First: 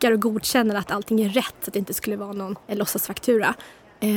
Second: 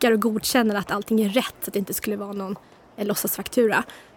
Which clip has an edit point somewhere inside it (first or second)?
first